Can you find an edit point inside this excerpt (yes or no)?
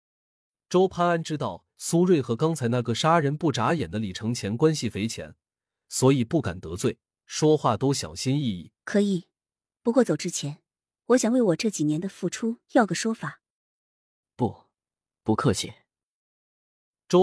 yes